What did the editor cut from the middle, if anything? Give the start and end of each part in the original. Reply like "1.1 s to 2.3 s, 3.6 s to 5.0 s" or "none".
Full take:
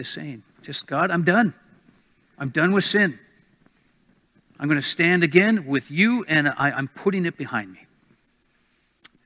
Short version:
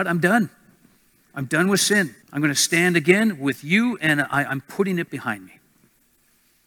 3.3 s to 4.5 s